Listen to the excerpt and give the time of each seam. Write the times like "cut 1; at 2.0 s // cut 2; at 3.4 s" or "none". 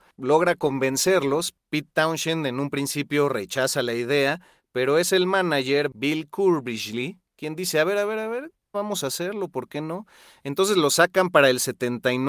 cut 1; at 8.7 s